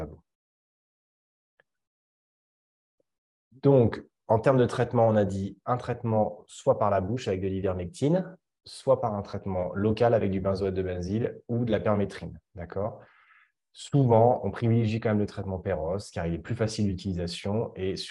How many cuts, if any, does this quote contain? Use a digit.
0